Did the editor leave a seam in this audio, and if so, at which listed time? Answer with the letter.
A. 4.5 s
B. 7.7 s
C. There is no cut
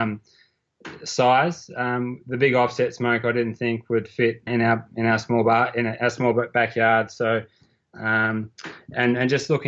A